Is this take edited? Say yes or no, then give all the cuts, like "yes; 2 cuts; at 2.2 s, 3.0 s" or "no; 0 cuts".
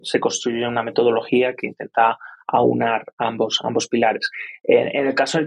no; 0 cuts